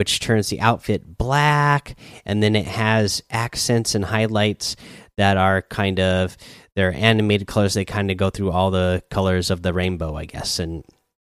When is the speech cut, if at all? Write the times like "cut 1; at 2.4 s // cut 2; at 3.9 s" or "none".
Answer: none